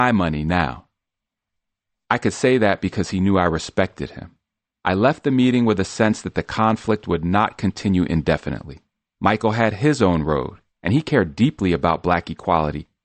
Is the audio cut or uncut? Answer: cut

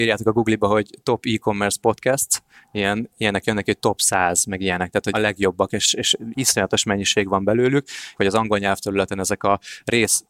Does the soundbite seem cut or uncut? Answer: cut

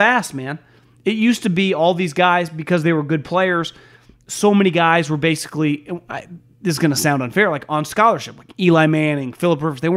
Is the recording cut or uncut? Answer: uncut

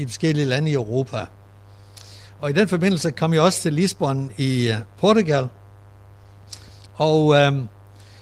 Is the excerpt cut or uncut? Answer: uncut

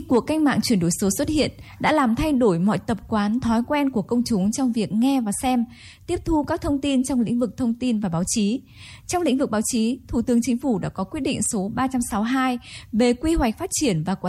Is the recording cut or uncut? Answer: uncut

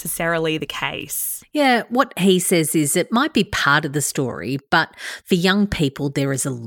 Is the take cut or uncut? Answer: uncut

